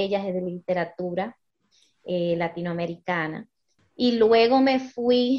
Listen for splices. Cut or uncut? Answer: cut